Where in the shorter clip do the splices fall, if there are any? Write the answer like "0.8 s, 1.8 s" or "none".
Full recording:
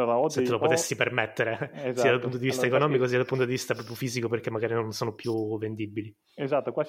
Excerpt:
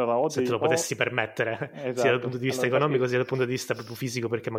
none